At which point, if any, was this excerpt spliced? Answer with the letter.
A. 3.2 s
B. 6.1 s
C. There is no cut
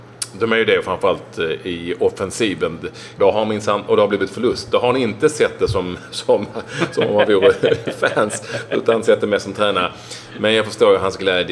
A